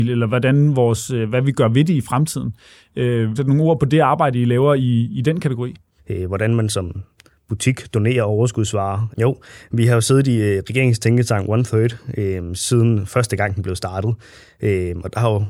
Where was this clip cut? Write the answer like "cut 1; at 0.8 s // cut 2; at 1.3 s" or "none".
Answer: cut 1; at 3.4 s // cut 2; at 6.0 s // cut 3; at 9.1 s